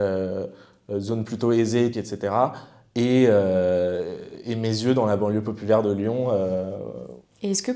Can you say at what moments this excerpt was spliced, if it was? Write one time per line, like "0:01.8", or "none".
0:01.9